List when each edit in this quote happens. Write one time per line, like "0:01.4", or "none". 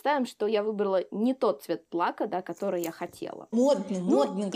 0:03.5